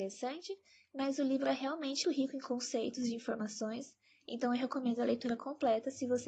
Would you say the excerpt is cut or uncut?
cut